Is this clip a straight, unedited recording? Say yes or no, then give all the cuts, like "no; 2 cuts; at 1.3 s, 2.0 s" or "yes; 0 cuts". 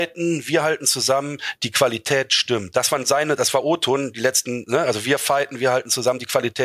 yes; 0 cuts